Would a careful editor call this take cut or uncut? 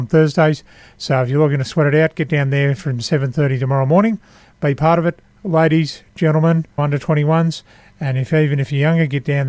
cut